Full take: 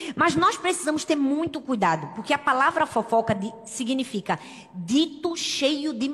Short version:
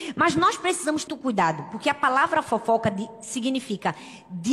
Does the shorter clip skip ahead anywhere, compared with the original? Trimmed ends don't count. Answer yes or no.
yes